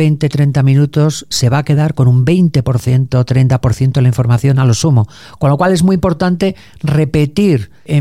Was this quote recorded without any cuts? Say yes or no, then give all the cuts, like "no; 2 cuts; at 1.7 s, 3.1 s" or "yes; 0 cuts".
yes; 0 cuts